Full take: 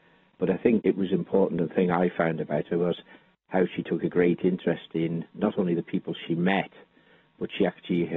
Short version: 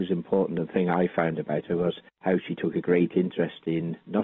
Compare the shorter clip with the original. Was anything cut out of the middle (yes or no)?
yes